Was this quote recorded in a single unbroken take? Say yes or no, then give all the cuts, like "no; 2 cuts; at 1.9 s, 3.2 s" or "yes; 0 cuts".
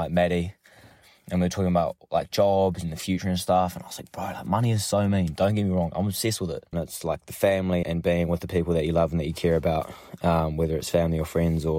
no; 2 cuts; at 6.7 s, 7.8 s